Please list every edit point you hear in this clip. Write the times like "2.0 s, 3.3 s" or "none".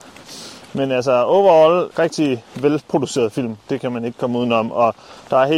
1.9 s